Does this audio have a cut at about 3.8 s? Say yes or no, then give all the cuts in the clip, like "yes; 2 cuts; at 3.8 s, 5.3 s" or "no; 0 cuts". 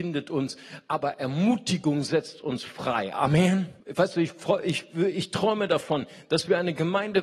yes; 1 cut; at 3.8 s